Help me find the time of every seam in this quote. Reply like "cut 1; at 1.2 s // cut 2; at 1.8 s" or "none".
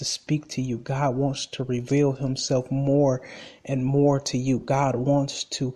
none